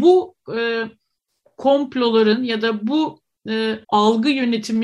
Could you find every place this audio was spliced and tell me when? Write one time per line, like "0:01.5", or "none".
0:03.8